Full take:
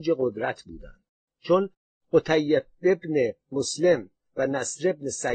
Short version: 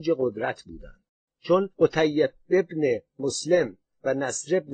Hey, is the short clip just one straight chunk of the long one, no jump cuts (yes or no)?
no